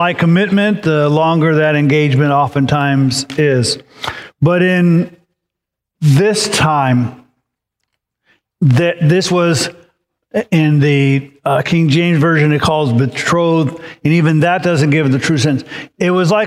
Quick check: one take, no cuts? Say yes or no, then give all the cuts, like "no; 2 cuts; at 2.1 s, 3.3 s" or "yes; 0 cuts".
yes; 0 cuts